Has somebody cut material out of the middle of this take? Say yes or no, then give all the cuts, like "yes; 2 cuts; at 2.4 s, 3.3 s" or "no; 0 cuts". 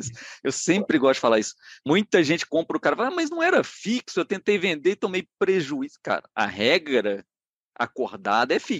no; 0 cuts